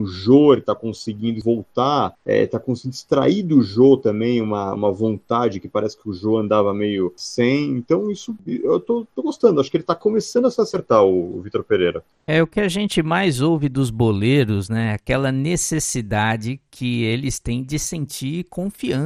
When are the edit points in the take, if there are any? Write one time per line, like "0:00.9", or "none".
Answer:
0:04.7